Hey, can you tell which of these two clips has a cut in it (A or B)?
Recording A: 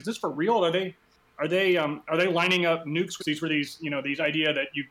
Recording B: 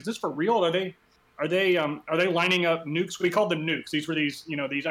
A